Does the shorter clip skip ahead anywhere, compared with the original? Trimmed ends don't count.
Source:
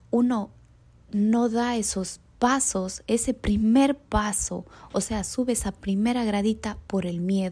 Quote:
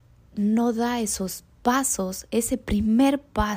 no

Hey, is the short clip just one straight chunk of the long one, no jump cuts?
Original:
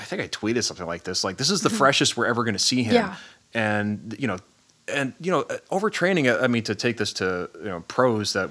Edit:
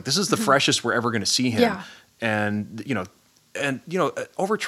yes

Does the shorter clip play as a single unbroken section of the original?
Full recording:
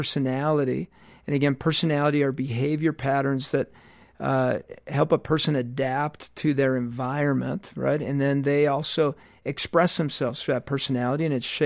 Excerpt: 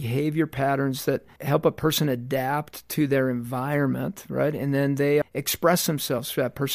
no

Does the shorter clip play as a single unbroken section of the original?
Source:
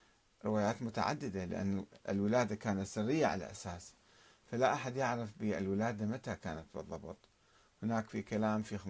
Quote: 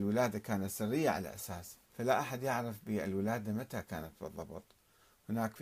no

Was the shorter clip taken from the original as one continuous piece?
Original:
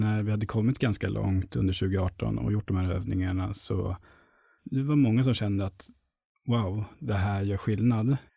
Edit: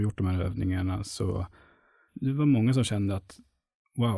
yes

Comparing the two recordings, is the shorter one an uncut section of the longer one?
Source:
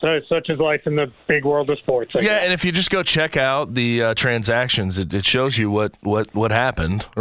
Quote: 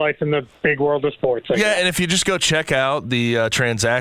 yes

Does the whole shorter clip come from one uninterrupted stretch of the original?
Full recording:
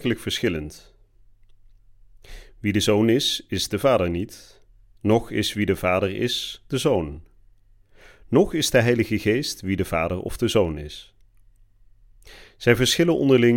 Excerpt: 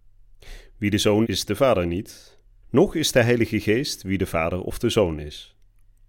no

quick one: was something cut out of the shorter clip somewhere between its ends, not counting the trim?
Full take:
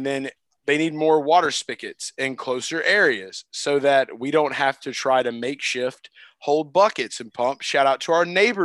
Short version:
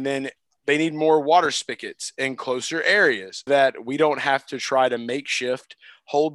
yes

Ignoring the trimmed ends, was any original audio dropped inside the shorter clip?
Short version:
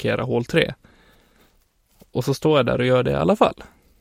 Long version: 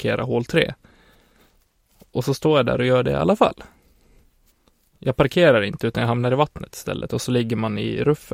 no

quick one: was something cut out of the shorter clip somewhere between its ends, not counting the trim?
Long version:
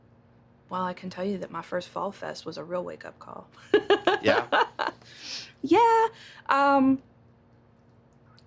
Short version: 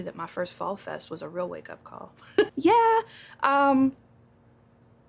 yes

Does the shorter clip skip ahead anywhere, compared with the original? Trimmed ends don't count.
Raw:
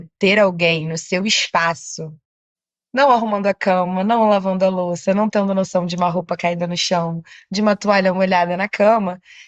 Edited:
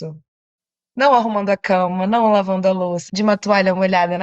yes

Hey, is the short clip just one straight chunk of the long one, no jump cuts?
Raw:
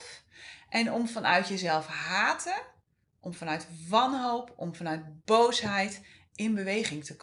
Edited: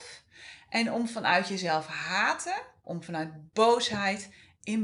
no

